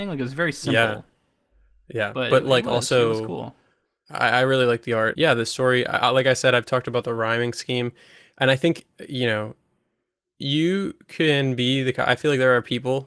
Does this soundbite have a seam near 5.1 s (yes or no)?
yes